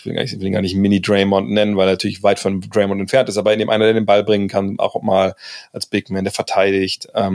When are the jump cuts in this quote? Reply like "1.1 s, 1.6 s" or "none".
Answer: none